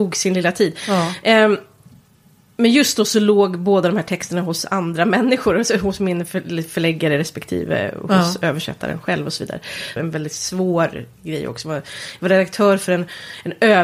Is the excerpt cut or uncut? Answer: cut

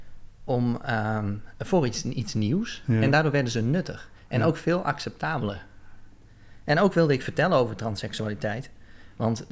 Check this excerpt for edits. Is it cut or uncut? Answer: uncut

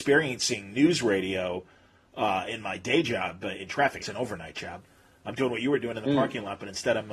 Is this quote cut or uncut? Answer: cut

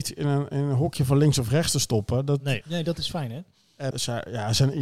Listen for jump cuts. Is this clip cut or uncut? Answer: cut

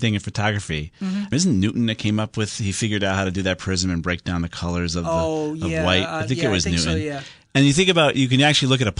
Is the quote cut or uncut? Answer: cut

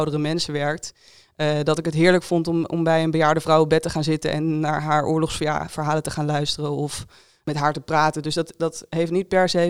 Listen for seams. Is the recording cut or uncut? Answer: uncut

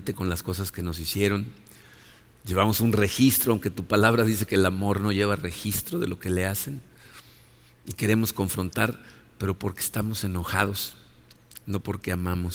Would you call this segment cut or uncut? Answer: uncut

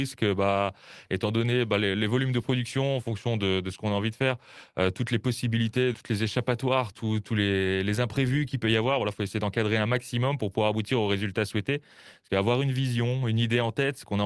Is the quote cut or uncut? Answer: cut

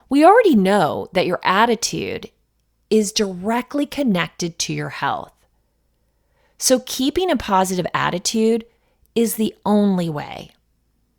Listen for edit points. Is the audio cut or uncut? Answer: uncut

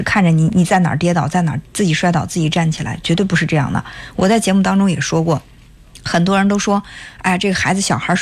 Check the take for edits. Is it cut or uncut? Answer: uncut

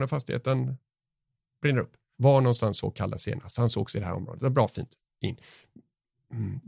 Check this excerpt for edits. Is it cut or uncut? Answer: cut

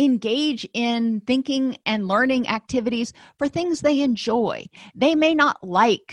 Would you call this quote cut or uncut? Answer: uncut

